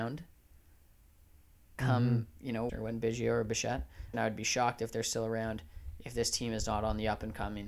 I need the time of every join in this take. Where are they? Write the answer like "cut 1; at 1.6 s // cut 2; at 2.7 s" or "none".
cut 1; at 2.7 s // cut 2; at 4.1 s